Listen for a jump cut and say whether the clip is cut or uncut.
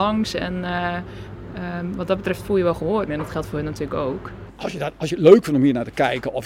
cut